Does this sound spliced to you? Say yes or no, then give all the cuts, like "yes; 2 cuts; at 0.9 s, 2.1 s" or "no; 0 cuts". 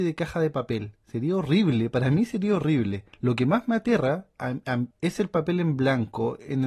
yes; 2 cuts; at 3.1 s, 4.9 s